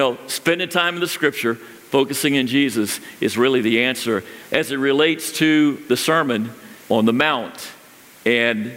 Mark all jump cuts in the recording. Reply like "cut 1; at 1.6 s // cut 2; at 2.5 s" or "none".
cut 1; at 4.4 s // cut 2; at 6.8 s